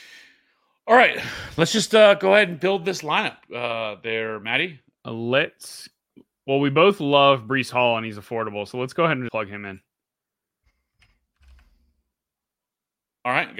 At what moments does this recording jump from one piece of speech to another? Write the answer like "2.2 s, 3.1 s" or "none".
5.0 s, 9.3 s